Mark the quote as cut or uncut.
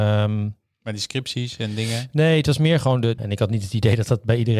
cut